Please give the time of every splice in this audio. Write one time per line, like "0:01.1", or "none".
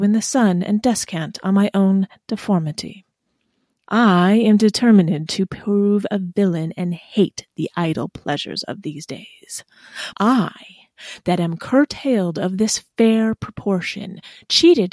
0:03.9
0:10.1

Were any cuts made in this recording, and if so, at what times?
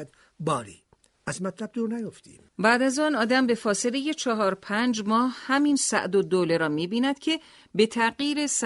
0:02.5

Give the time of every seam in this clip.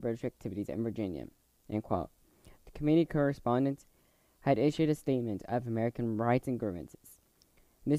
0:02.5

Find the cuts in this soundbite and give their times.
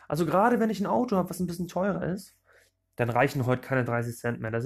none

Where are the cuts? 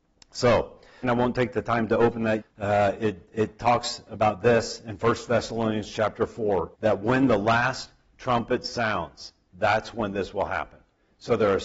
0:01.0
0:02.4
0:06.7

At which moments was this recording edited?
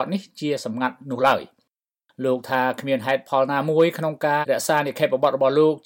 0:04.4

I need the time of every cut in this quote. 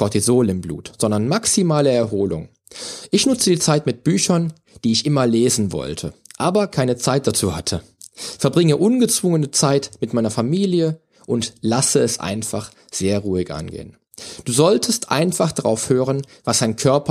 none

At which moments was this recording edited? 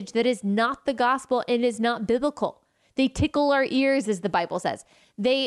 none

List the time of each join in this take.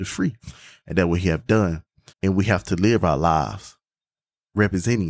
0:02.1

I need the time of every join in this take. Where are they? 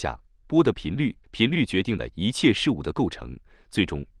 0:01.2

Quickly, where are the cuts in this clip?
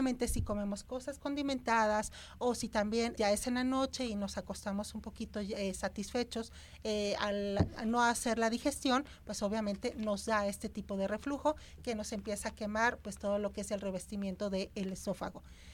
0:03.2

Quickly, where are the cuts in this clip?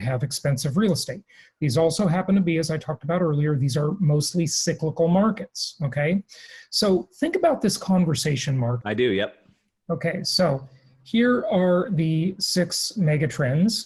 0:08.8

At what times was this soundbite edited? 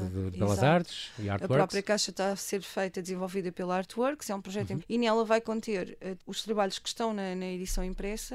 0:04.8
0:06.2

